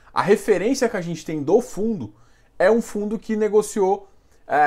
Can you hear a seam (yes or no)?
no